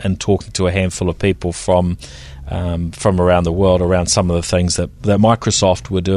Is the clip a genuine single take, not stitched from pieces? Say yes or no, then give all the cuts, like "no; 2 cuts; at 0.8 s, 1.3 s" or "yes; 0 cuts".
yes; 0 cuts